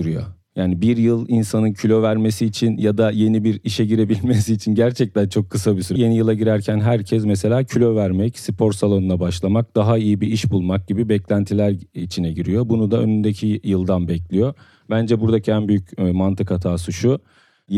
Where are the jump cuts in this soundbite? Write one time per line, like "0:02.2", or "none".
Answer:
0:06.0